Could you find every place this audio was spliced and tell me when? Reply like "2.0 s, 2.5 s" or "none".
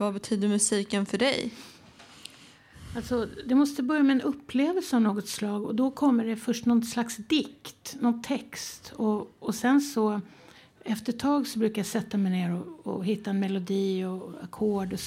none